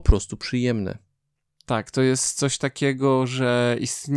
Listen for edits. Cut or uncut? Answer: uncut